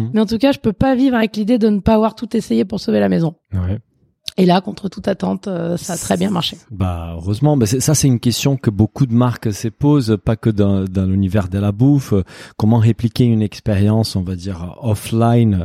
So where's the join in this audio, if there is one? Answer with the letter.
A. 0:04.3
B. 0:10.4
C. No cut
C